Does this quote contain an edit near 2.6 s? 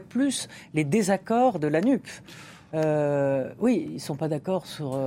no; 0 cuts

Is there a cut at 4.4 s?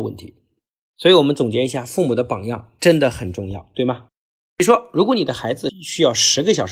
yes; 1 cut; at 4.4 s

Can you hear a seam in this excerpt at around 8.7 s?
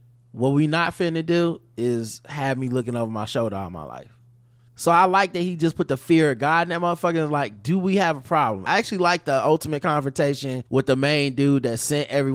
yes; 3 cuts; at 4.7 s, 8.7 s, 10.7 s

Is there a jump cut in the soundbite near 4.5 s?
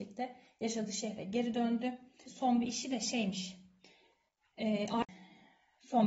no; 1 cut; at 2.3 s

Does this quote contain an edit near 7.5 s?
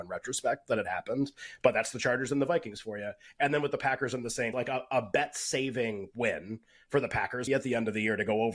yes; 2 cuts; at 4.5 s, 7.5 s

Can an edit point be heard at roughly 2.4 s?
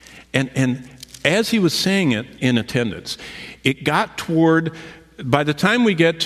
yes; 1 cut; at 2.4 s

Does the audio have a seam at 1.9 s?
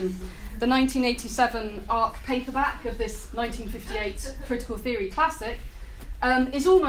yes; 1 cut; at 1.9 s

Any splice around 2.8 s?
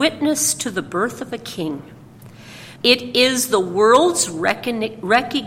yes; 1 cut; at 2.8 s

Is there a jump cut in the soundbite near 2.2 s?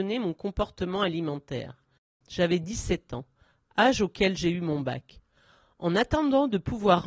yes; 1 cut; at 2.2 s

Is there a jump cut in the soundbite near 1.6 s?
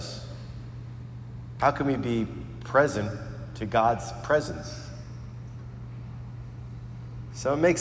yes; 1 cut; at 1.6 s

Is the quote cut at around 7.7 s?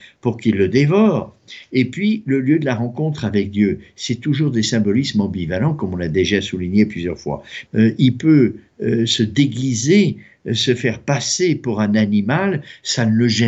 yes; 1 cut; at 7.7 s

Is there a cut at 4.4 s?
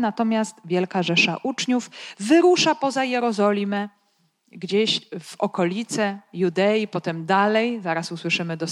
no; 0 cuts

